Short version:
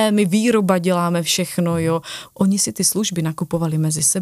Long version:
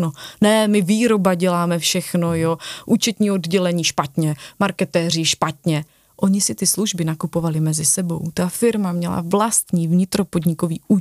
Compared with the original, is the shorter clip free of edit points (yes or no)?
no